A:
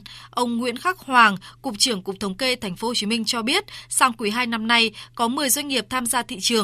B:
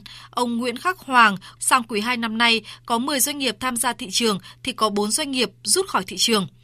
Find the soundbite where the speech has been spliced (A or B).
B